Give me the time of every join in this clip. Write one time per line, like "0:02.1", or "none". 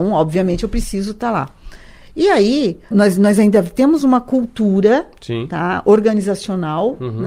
0:02.9